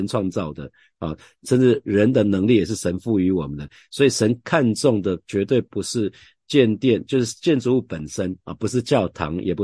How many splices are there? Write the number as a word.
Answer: zero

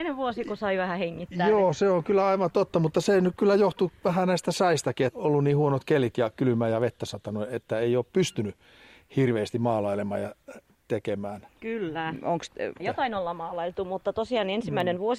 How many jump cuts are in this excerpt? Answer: three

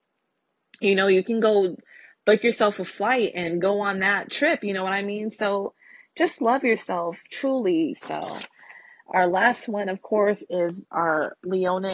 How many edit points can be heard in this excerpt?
one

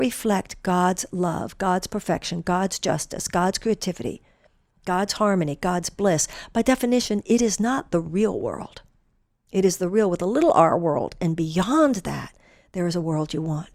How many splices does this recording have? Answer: zero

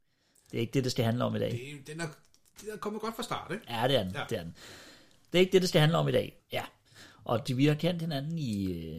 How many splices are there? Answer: two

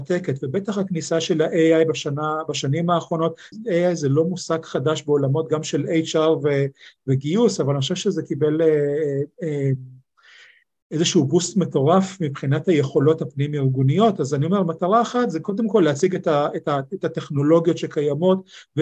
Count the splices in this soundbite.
one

